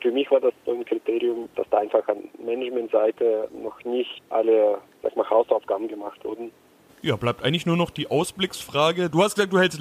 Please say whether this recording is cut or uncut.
cut